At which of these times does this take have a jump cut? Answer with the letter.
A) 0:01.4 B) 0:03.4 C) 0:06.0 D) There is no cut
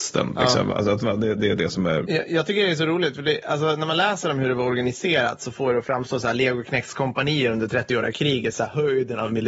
D